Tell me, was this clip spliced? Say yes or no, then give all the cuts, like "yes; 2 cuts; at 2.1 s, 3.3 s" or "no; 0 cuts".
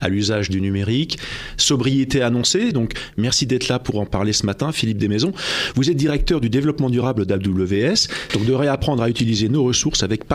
yes; 2 cuts; at 2.7 s, 8.3 s